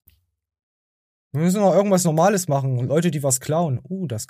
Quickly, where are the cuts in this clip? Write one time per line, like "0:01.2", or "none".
none